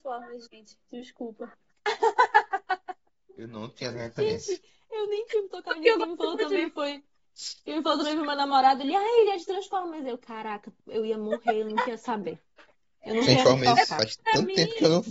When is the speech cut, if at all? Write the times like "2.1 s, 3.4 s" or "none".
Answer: none